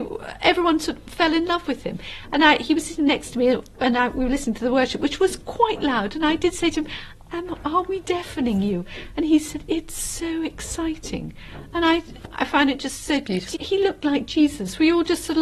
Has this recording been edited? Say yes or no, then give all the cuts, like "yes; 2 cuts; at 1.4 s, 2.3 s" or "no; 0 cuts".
yes; 2 cuts; at 12.2 s, 13.5 s